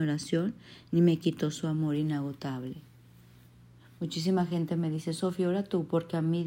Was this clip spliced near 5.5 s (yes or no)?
no